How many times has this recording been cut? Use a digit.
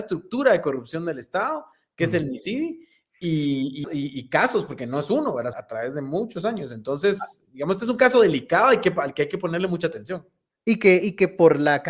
2